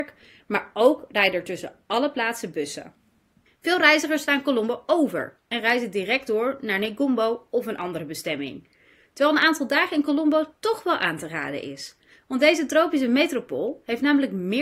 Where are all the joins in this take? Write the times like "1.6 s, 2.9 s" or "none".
3.5 s